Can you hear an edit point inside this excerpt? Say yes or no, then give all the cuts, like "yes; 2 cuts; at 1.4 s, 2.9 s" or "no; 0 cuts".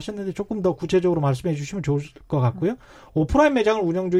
no; 0 cuts